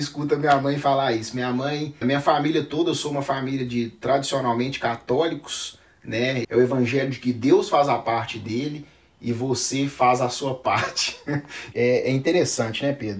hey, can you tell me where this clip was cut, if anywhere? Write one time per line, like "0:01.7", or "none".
0:02.0
0:06.4
0:11.7